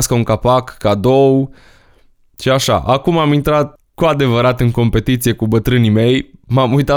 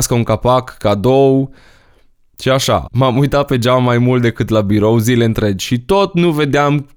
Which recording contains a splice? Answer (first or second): second